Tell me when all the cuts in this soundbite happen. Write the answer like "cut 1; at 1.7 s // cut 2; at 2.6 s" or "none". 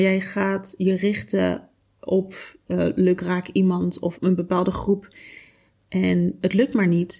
cut 1; at 4.1 s